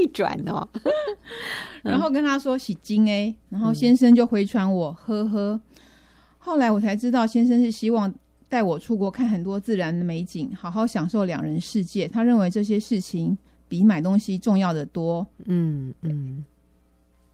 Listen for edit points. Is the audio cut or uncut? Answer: cut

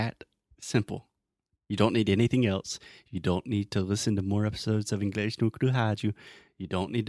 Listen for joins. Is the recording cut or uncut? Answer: uncut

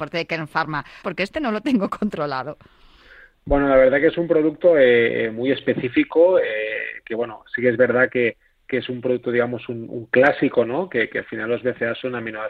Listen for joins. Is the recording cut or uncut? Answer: cut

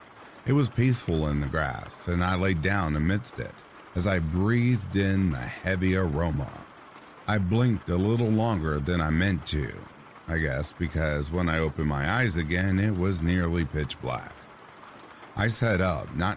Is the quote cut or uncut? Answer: uncut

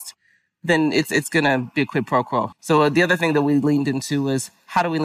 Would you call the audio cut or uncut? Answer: cut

